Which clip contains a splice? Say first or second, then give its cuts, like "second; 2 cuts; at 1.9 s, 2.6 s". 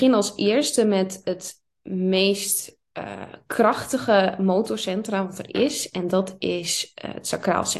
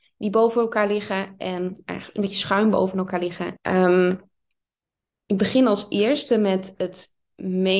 second; 1 cut; at 3.6 s